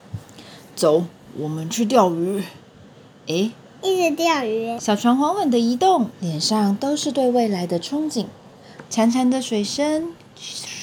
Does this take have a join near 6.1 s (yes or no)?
yes